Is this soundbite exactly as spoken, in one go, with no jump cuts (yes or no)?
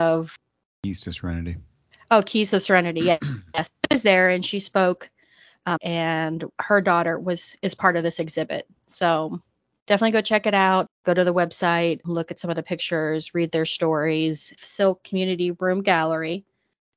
no